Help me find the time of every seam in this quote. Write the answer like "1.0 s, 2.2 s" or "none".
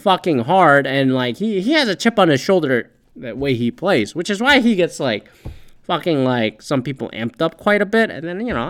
none